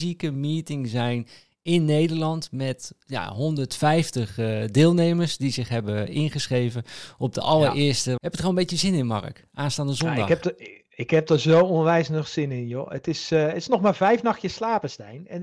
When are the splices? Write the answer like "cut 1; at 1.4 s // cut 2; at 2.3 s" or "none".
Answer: cut 1; at 8.2 s

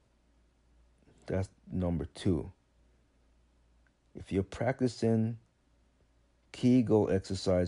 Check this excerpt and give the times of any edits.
none

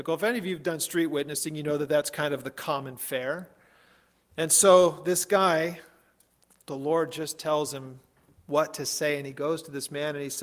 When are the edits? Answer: none

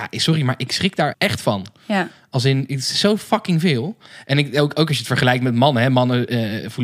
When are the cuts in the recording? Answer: cut 1; at 1.1 s

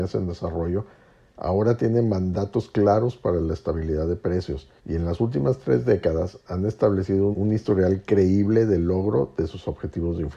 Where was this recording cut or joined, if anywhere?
cut 1; at 4.8 s // cut 2; at 7.3 s

